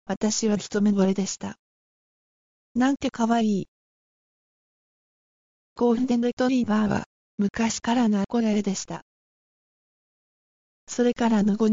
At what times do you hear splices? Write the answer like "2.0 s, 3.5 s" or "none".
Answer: none